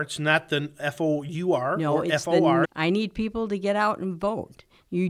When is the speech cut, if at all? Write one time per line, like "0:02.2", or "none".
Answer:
0:02.6

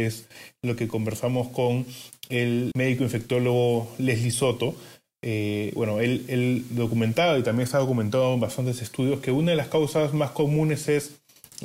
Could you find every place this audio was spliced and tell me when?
0:02.7

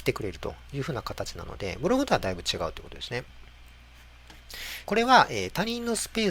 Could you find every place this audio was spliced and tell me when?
0:04.8

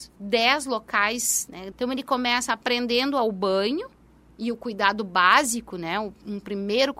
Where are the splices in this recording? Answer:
0:01.7

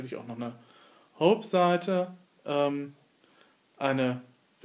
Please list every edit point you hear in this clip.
none

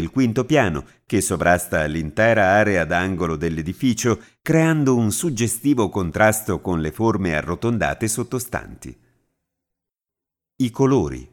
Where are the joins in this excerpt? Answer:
none

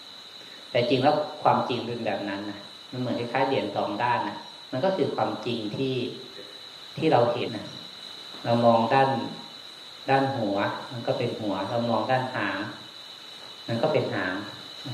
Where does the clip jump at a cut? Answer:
0:07.5

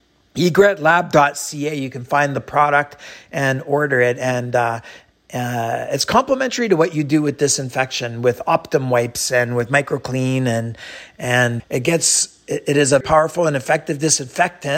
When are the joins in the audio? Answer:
0:11.6
0:13.0

